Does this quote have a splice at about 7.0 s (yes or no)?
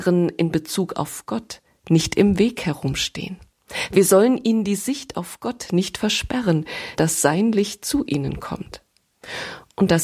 yes